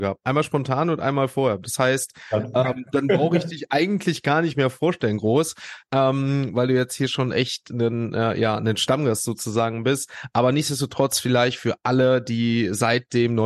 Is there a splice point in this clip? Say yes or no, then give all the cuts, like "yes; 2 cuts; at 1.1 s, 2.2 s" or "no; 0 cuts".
no; 0 cuts